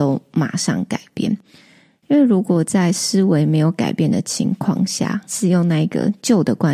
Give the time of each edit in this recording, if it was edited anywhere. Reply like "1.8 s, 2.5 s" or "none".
none